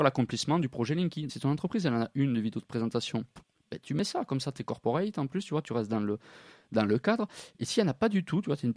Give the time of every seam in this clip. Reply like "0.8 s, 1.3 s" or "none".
1.3 s